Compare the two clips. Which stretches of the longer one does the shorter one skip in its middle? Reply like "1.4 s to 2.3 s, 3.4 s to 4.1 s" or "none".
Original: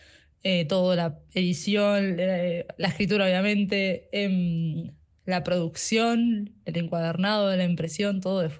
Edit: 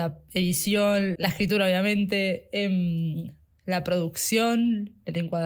2.2 s to 2.8 s